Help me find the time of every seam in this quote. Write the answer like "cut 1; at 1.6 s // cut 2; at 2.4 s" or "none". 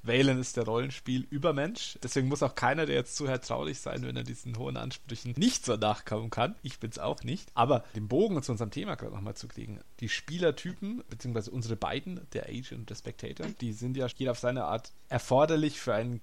cut 1; at 7.9 s // cut 2; at 14.1 s

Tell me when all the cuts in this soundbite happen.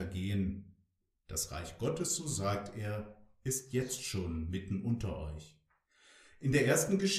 cut 1; at 1.1 s

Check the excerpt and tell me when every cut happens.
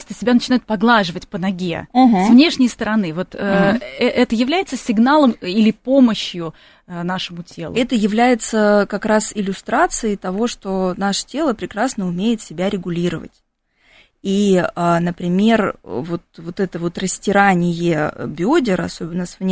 none

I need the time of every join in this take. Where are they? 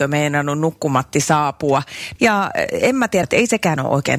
cut 1; at 2.2 s // cut 2; at 3.2 s

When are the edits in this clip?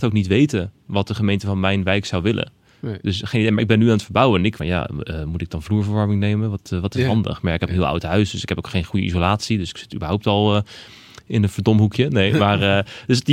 cut 1; at 4.6 s

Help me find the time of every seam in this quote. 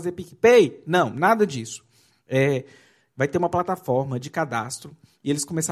none

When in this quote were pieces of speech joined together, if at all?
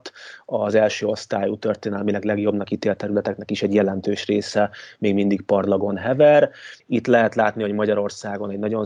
cut 1; at 6.8 s

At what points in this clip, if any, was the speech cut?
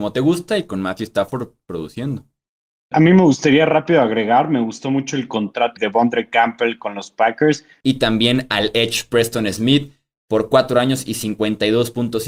cut 1; at 2.9 s // cut 2; at 5.8 s // cut 3; at 7.8 s

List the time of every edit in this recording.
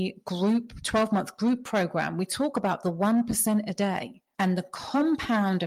none

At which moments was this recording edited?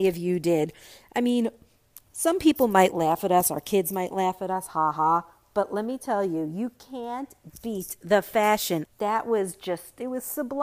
cut 1; at 8.9 s

